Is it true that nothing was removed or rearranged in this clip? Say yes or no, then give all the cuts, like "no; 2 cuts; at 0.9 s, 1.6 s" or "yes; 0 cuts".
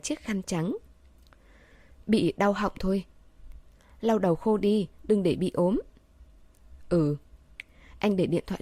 yes; 0 cuts